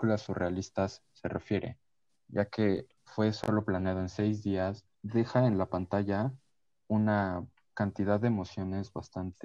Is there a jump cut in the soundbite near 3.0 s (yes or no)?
yes